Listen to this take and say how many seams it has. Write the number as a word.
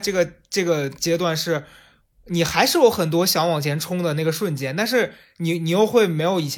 zero